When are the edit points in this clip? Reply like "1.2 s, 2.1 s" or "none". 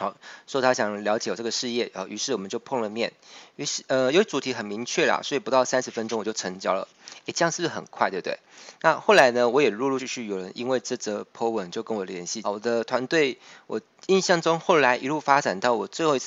10.0 s, 12.4 s